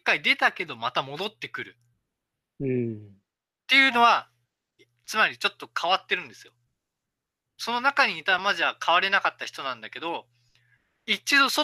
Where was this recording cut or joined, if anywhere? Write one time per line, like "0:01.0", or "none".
0:08.4

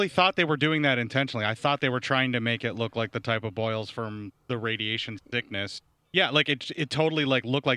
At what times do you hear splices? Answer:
0:06.0

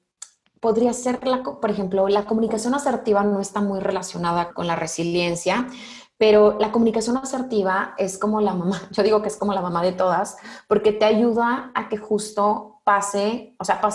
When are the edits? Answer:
0:04.5

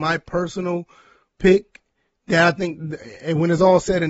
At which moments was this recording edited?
none

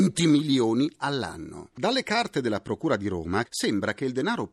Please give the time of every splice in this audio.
0:01.7
0:03.5

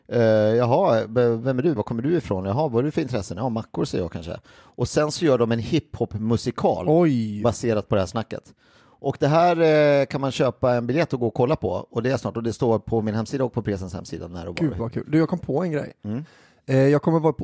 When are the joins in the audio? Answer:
0:01.8

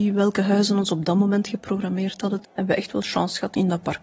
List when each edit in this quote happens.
0:02.4

